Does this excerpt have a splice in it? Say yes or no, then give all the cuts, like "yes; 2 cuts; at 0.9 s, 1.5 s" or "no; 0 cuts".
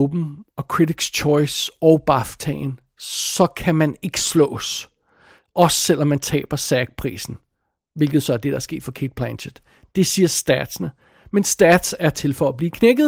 no; 0 cuts